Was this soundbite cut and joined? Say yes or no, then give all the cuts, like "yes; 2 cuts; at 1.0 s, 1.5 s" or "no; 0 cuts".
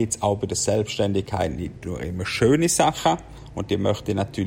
no; 0 cuts